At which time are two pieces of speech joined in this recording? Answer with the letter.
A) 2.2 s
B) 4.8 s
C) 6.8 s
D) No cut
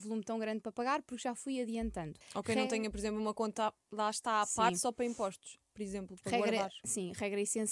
A